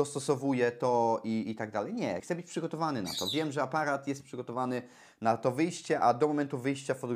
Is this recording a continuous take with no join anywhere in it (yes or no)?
no